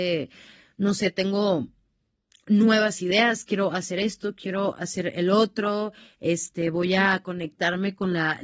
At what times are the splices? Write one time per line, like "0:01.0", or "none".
none